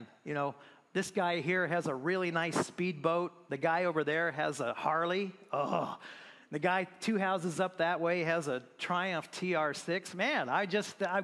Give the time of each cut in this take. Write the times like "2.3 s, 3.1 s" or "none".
none